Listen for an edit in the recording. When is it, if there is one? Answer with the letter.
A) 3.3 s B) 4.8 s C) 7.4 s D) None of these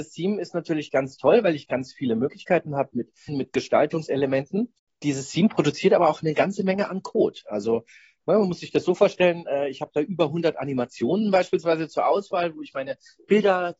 A